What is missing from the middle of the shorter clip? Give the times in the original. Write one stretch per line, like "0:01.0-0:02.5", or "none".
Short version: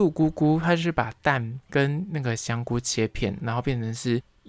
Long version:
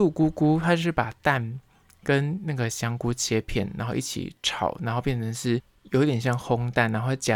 0:01.6-0:02.0
0:03.7-0:04.8